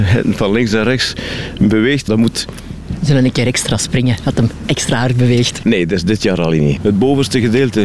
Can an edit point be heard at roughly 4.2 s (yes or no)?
no